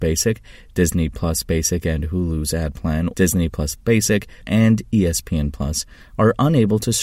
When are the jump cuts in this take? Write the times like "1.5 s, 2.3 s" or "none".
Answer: 3.1 s, 4.4 s